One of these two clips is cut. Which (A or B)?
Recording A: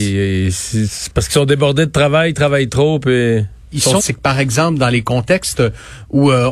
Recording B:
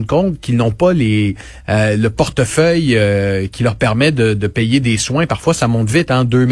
A